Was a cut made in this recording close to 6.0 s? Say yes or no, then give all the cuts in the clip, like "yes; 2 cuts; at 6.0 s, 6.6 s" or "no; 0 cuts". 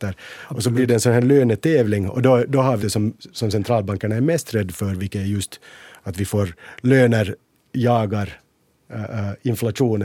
no; 1 cut; at 2.8 s